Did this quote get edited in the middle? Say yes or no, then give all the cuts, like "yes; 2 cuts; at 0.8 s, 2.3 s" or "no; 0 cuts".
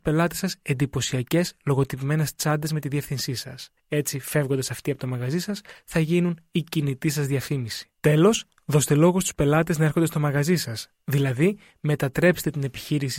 no; 0 cuts